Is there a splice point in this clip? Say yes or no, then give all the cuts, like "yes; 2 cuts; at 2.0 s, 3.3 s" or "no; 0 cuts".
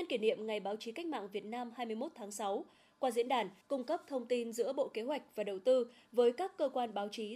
yes; 1 cut; at 3.6 s